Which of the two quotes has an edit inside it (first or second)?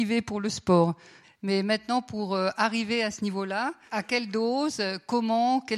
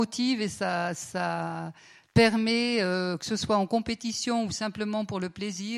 first